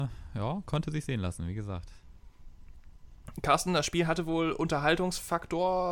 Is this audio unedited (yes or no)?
yes